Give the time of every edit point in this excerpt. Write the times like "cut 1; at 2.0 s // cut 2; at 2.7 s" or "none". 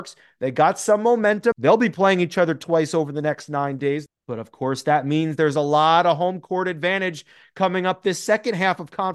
cut 1; at 1.5 s // cut 2; at 4.1 s

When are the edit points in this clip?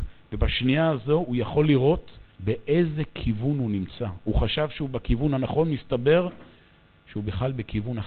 cut 1; at 2.3 s

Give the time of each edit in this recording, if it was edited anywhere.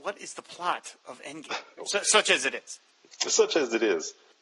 cut 1; at 1.8 s

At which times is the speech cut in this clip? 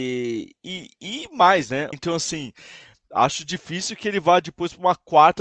cut 1; at 1.9 s

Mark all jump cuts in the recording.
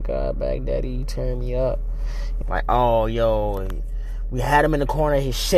cut 1; at 2.4 s

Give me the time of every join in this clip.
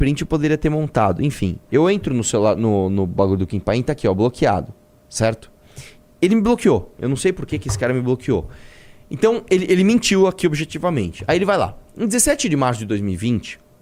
none

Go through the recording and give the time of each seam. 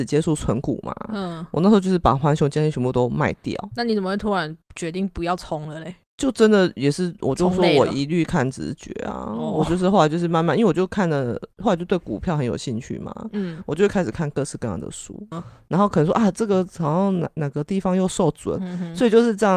cut 1; at 15.3 s // cut 2; at 18.6 s

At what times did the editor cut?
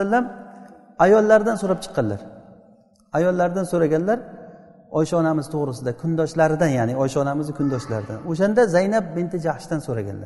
none

